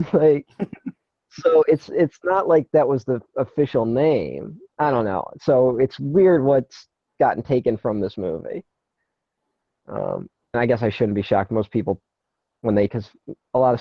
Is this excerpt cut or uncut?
cut